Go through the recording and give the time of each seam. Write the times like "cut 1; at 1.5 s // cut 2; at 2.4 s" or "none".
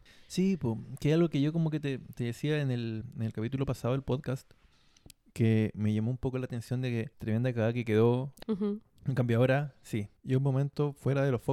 cut 1; at 7.1 s // cut 2; at 8.4 s // cut 3; at 10.2 s

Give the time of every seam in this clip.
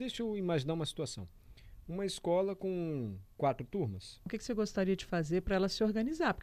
cut 1; at 4.3 s

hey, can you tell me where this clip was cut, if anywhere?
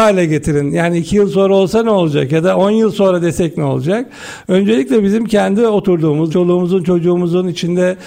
cut 1; at 6.3 s

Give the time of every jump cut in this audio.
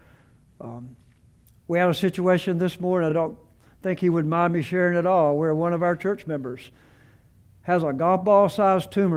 none

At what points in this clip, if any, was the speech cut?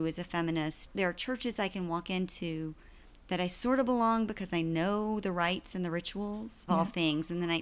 cut 1; at 6.7 s

